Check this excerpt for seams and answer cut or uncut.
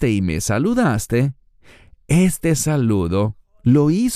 uncut